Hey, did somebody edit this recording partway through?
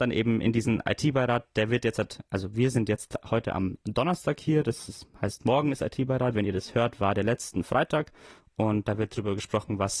no; 0 cuts

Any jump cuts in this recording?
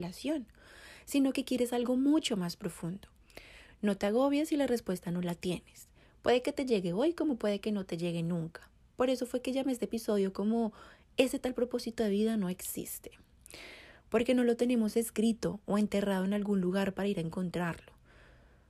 no; 0 cuts

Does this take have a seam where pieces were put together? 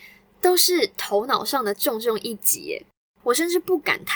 yes; 1 cut; at 3.2 s

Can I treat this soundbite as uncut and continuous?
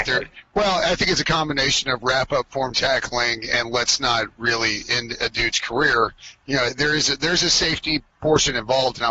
yes; 0 cuts

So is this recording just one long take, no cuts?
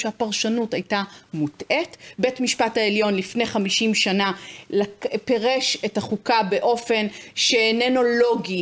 yes; 0 cuts

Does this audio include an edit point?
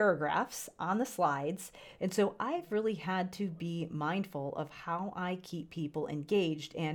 yes; 1 cut; at 1.9 s

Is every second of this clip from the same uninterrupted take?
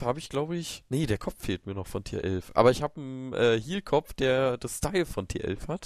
yes; 0 cuts

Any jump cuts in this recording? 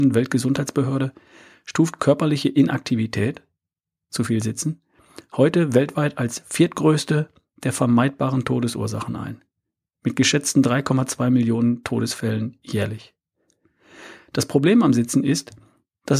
no; 0 cuts

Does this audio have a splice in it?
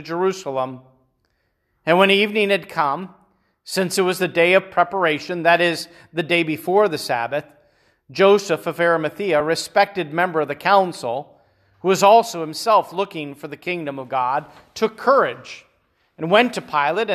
no; 0 cuts

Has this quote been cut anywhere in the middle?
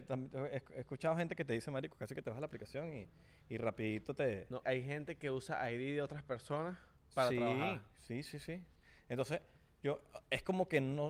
yes; 1 cut; at 4.6 s

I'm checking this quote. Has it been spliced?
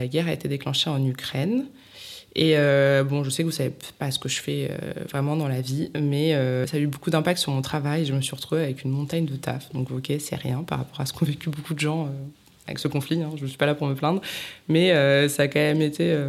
no; 0 cuts

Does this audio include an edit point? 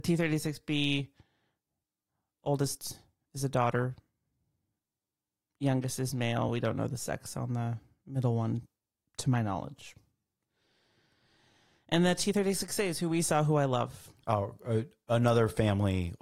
no; 0 cuts

